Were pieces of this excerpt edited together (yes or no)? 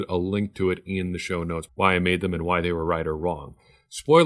yes